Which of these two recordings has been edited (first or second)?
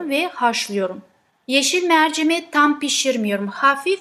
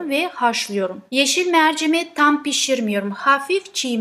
second